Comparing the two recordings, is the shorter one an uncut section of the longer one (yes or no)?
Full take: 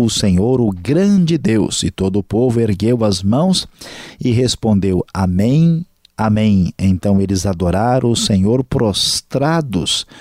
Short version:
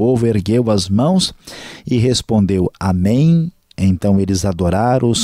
no